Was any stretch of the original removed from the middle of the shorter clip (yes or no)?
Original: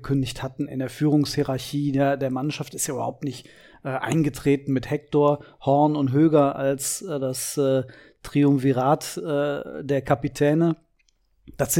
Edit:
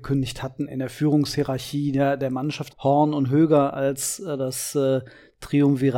yes